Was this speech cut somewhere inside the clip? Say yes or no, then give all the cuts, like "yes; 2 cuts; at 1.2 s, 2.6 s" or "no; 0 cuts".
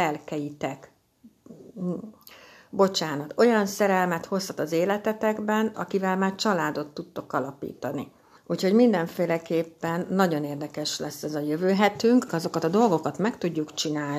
yes; 3 cuts; at 5.7 s, 8.4 s, 12.3 s